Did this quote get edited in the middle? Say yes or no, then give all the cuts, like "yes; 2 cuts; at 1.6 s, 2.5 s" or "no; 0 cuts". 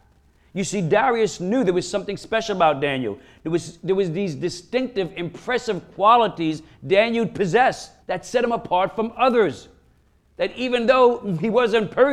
yes; 1 cut; at 8.0 s